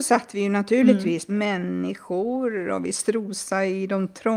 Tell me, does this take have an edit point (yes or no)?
yes